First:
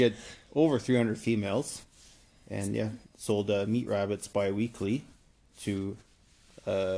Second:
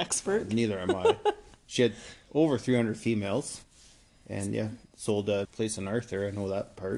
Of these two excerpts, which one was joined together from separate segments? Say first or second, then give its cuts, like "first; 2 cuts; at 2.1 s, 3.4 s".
second; 1 cut; at 5.5 s